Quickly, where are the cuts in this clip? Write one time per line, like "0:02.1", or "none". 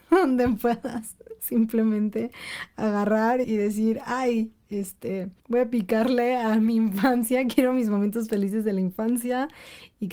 0:03.4
0:05.4